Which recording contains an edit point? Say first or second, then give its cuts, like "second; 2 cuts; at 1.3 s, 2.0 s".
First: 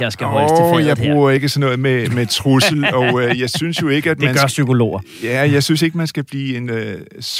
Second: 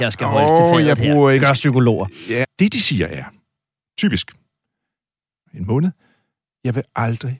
second; 3 cuts; at 1.4 s, 2.4 s, 5.5 s